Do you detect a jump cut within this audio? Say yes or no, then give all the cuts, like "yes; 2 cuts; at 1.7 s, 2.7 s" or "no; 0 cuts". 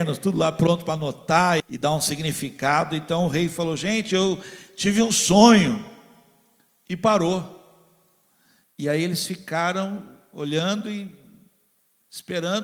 yes; 1 cut; at 1.6 s